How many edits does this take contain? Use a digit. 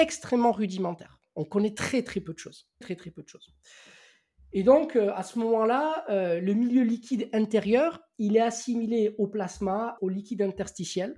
2